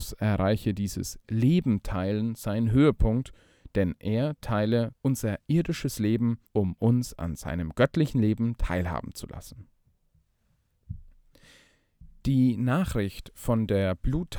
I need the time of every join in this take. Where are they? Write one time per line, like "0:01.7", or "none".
0:04.9
0:06.5